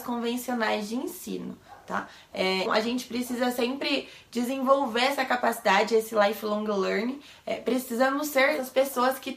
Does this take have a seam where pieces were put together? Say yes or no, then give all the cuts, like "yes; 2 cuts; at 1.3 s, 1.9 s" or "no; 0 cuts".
yes; 1 cut; at 2.7 s